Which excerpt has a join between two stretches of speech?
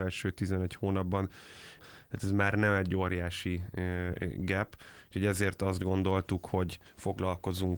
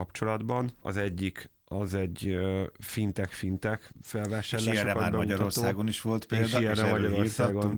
first; 1 cut; at 1.8 s

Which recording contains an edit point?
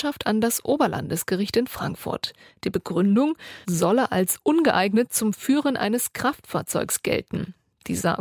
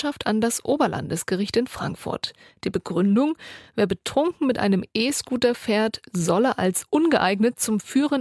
first; 1 cut; at 3.6 s

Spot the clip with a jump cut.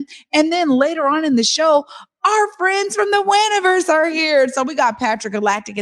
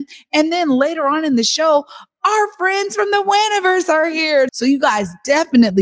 second; 1 cut; at 4.5 s

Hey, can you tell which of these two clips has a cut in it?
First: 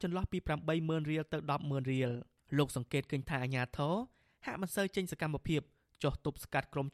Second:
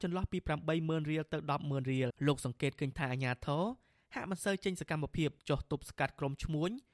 second; 2 cuts; at 2.1 s, 5.4 s

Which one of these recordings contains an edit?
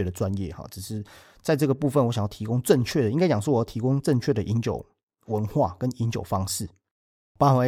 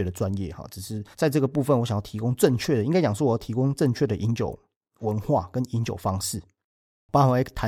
second; 1 cut; at 1.1 s

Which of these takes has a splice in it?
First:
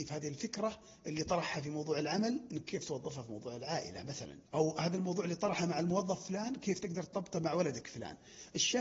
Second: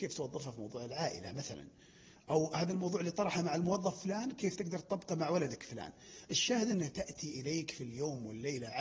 first; 1 cut; at 4.5 s

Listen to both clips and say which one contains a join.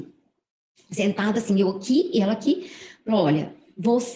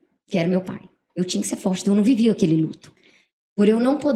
second; 1 cut; at 1.1 s

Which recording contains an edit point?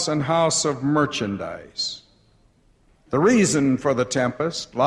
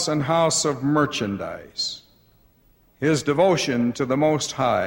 first; 1 cut; at 2.9 s

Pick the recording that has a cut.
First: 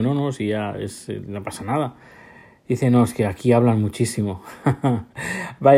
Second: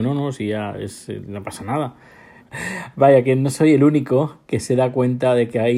second; 1 cut; at 2.4 s

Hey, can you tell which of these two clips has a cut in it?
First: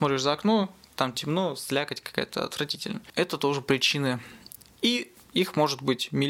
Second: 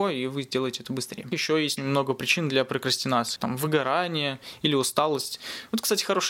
second; 2 cuts; at 1.8 s, 3.4 s

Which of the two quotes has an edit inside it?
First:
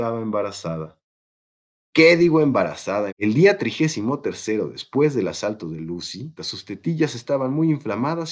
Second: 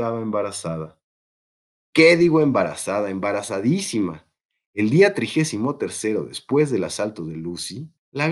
first; 2 cuts; at 3.1 s, 6.4 s

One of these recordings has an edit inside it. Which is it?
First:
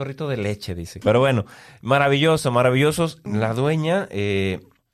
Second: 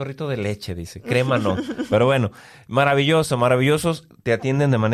first; 2 cuts; at 1.0 s, 3.3 s

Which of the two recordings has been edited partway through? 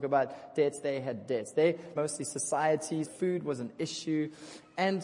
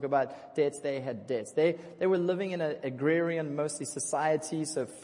first; 2 cuts; at 2.0 s, 3.0 s

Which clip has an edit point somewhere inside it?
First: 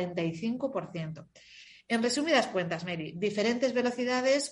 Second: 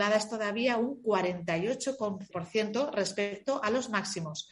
second; 1 cut; at 2.3 s

